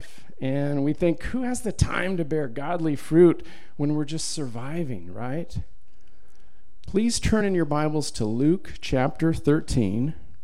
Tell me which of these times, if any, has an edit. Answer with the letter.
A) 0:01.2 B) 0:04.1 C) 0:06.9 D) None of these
C